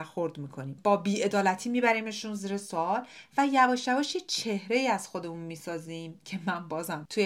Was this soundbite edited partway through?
no; 0 cuts

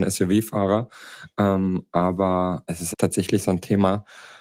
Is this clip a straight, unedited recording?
no; 1 cut; at 2.9 s

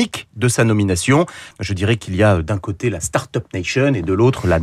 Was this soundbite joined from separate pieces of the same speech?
yes; 1 cut; at 1.5 s

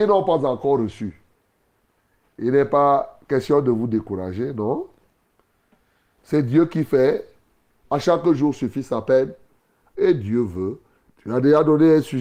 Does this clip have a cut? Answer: yes; 3 cuts; at 7.8 s, 9.9 s, 11.1 s

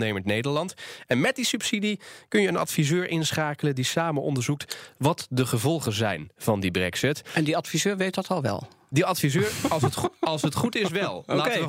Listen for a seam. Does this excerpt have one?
no; 0 cuts

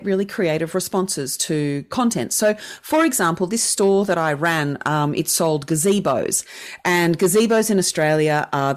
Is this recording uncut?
yes; 0 cuts

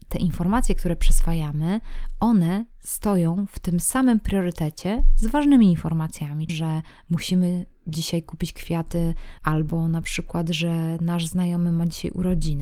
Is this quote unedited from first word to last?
no; 2 cuts; at 6.5 s, 9.4 s

